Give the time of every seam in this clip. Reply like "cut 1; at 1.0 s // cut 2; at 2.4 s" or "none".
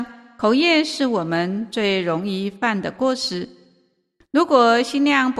none